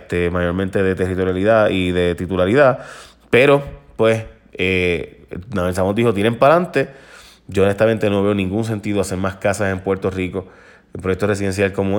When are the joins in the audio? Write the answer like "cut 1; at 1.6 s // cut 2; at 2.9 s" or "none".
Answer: none